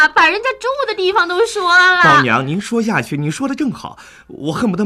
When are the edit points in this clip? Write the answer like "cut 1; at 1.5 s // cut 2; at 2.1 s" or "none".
none